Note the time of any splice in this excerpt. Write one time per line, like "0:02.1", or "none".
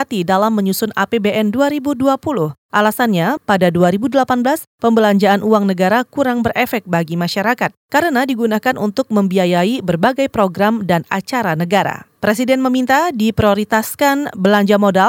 0:03.4